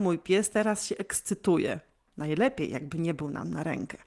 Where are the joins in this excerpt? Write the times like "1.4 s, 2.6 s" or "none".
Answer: 2.1 s